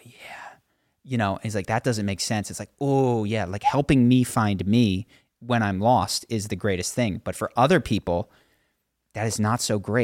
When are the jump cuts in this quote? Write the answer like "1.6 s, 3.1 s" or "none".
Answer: none

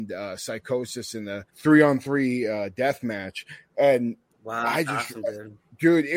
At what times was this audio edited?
1.5 s

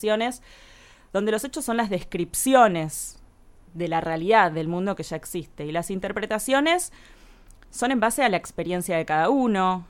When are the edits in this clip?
none

